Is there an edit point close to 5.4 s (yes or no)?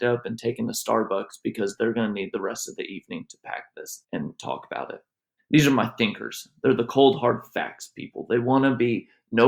yes